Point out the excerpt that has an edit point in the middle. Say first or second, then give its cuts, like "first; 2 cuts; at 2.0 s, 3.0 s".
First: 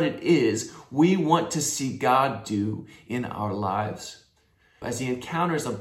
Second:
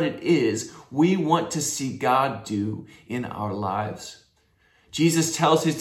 first; 1 cut; at 4.8 s